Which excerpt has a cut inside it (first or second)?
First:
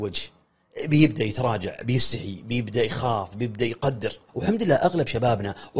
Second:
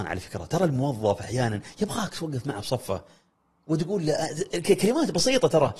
first